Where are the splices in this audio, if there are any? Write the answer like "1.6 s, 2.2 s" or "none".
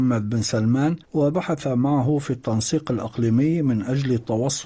1.0 s